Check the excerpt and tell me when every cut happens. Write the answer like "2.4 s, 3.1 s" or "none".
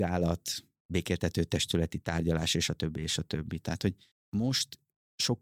none